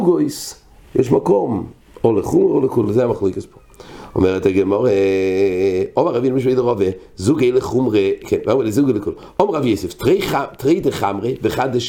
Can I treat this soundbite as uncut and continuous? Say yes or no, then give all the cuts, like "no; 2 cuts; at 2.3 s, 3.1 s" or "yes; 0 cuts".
yes; 0 cuts